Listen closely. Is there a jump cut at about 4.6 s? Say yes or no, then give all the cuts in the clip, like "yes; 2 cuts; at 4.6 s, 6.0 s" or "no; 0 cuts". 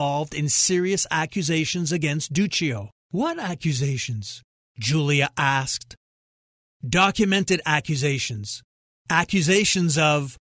no; 1 cut; at 3.0 s